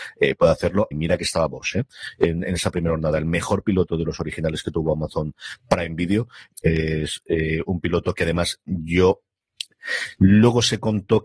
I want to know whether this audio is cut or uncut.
cut